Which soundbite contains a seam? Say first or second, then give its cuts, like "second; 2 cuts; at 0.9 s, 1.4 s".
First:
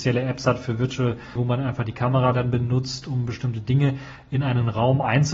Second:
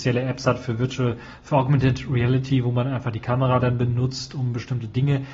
first; 1 cut; at 1.4 s